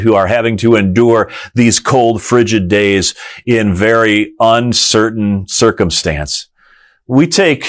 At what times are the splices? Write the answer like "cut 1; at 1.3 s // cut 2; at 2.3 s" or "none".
none